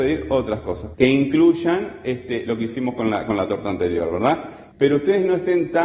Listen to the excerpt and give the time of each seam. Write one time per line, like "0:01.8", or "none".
0:00.9
0:04.7